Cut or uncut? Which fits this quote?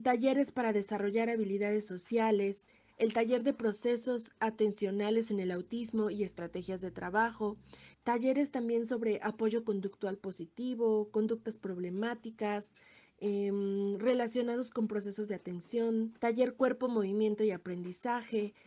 cut